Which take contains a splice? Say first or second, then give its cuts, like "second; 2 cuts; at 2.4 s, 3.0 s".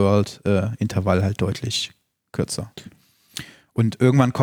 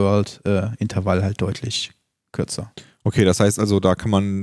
first; 1 cut; at 2.9 s